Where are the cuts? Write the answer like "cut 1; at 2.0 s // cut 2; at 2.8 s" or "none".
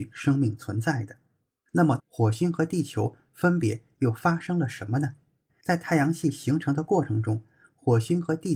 cut 1; at 2.0 s // cut 2; at 5.5 s